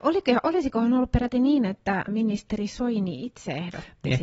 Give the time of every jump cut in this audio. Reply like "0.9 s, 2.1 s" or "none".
2.1 s